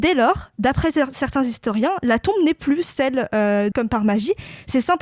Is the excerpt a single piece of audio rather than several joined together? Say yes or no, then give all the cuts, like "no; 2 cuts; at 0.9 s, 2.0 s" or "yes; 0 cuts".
no; 1 cut; at 3.7 s